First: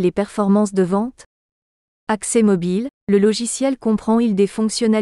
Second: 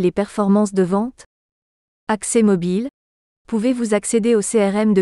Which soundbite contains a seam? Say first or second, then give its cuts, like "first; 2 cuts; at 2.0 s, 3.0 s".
first; 1 cut; at 3.0 s